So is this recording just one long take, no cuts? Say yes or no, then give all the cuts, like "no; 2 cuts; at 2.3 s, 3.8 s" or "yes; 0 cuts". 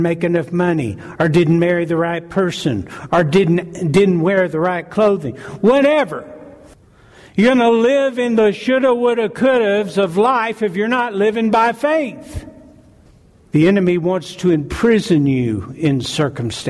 yes; 0 cuts